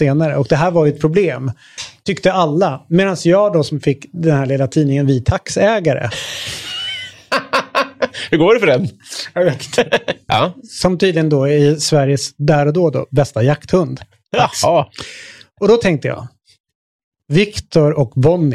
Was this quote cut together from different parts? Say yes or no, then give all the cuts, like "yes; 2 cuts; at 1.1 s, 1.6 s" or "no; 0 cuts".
yes; 1 cut; at 10.3 s